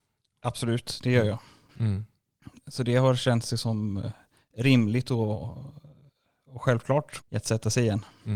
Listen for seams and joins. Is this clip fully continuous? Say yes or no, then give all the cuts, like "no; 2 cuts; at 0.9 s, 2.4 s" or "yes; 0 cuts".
no; 2 cuts; at 1.7 s, 7.2 s